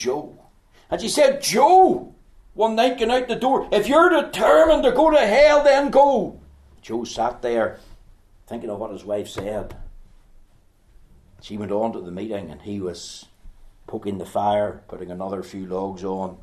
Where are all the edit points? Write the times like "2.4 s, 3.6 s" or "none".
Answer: 6.8 s

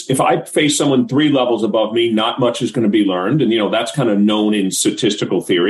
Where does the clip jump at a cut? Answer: none

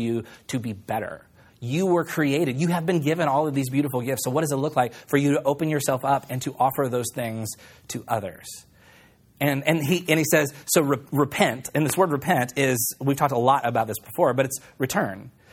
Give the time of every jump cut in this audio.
none

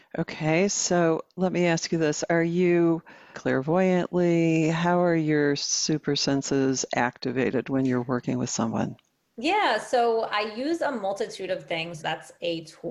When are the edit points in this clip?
3.3 s, 12.0 s

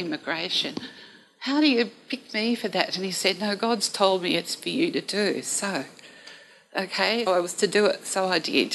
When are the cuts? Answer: 7.3 s

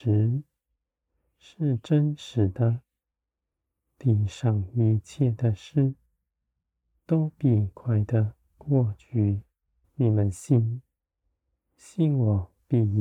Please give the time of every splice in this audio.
7.7 s, 9.8 s

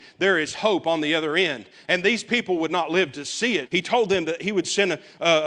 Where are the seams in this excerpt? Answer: 3.7 s

